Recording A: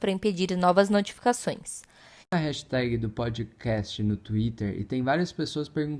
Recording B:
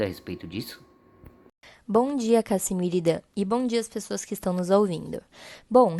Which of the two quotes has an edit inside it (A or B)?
A